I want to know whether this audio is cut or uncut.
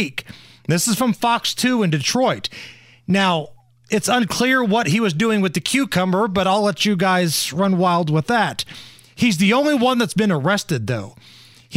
uncut